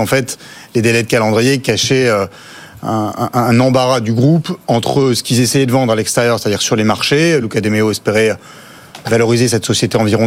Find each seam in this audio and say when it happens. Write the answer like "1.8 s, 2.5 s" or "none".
none